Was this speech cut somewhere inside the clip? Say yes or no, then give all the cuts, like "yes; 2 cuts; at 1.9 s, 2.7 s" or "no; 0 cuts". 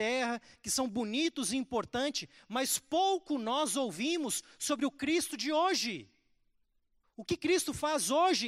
yes; 1 cut; at 7.0 s